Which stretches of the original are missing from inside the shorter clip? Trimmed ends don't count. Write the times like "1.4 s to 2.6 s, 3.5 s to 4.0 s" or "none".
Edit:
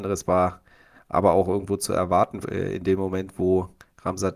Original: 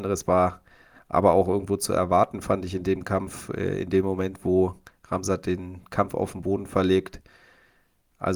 2.4 s to 3.5 s